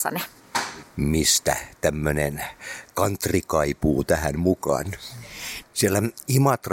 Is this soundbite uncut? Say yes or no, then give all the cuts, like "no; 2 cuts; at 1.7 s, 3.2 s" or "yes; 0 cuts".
no; 1 cut; at 5.6 s